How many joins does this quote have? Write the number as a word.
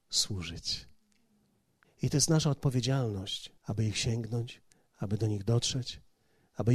two